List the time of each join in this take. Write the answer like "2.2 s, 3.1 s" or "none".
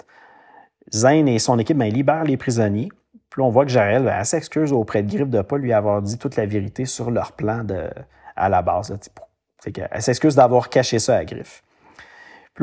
none